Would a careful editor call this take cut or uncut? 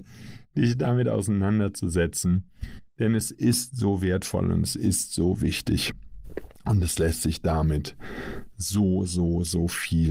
uncut